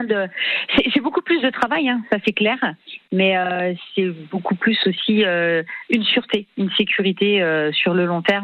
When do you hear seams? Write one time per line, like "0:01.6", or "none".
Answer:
none